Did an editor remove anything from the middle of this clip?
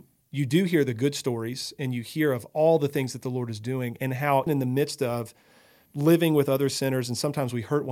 yes; 1 cut; at 4.5 s

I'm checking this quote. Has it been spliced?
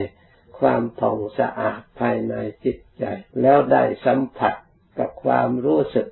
yes; 2 cuts; at 1.3 s, 3.3 s

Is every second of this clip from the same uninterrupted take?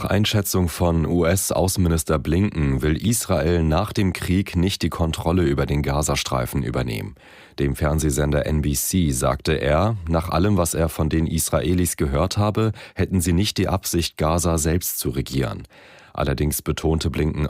yes; 0 cuts

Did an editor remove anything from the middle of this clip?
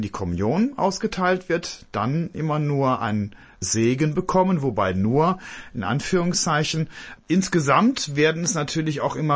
yes; 1 cut; at 7.2 s

